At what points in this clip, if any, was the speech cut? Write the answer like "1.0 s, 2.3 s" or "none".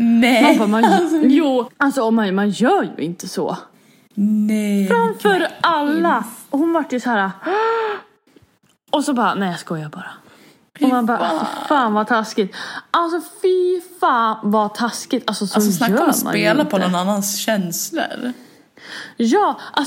1.7 s